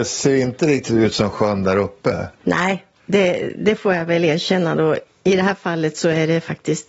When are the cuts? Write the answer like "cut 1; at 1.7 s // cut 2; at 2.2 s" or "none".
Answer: none